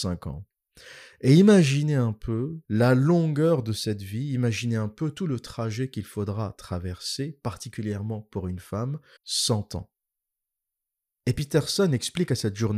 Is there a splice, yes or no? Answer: yes